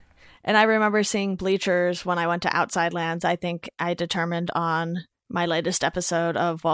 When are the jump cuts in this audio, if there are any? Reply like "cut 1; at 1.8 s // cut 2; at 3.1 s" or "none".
none